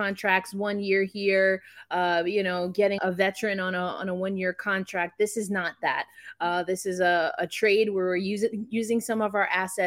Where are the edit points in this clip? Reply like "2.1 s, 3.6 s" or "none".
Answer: 3.0 s